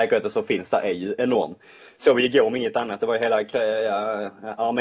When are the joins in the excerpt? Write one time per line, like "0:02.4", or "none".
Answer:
none